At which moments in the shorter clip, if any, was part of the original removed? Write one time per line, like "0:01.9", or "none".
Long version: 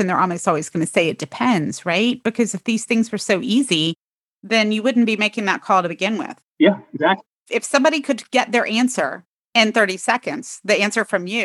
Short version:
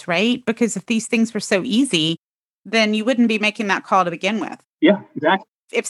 none